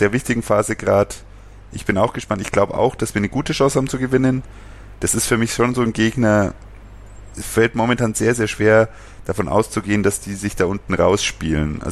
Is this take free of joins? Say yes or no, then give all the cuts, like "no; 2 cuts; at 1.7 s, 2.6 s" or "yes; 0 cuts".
no; 1 cut; at 4.9 s